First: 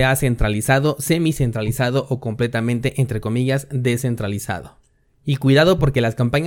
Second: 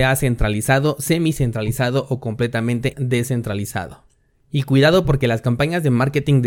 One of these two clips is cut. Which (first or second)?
second